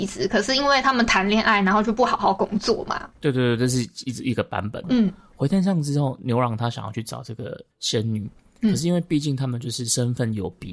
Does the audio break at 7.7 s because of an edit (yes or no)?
yes